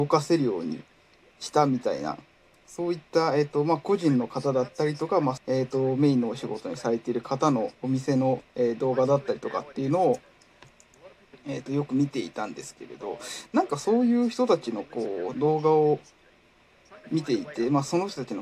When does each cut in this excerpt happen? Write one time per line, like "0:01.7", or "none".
0:05.4
0:07.7